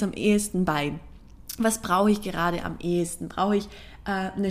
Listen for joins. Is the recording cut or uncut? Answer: uncut